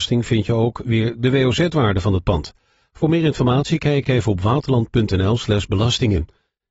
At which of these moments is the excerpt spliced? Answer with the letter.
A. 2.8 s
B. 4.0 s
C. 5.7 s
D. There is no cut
D